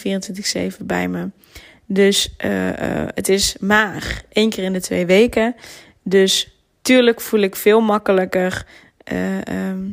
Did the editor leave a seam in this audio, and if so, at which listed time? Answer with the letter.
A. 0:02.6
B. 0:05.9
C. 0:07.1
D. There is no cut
D